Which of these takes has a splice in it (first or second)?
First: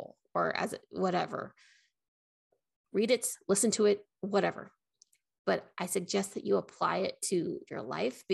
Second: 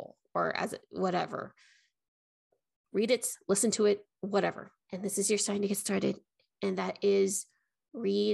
second